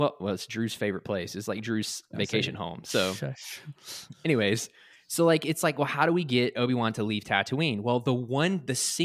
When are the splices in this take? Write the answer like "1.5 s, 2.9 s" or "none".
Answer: none